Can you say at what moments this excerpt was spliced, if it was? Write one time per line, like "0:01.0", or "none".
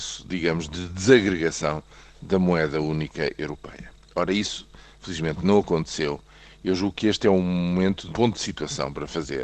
0:08.1